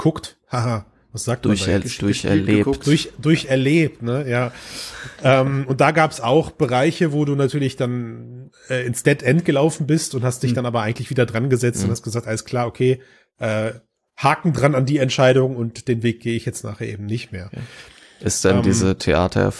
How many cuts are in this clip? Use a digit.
0